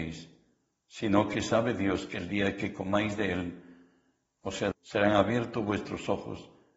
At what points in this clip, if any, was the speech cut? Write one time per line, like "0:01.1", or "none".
0:04.7